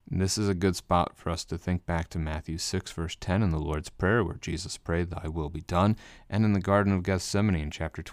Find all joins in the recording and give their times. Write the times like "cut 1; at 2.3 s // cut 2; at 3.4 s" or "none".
none